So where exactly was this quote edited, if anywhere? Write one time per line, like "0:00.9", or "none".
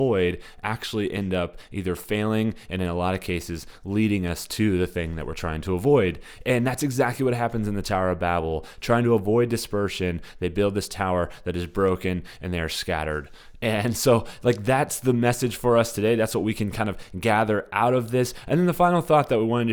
none